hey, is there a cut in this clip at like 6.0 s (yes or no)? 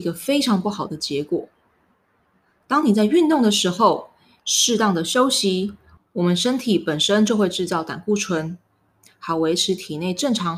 yes